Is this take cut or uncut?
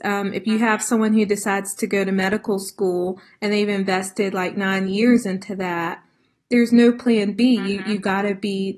uncut